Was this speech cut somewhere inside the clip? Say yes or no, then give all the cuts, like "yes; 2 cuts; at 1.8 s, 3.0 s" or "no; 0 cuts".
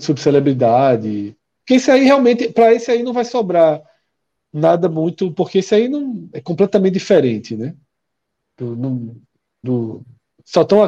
yes; 2 cuts; at 1.6 s, 9.6 s